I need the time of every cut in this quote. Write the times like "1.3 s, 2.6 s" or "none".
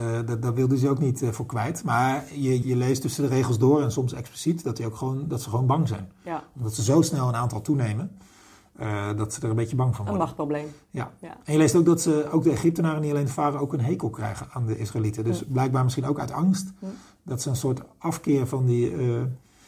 2.6 s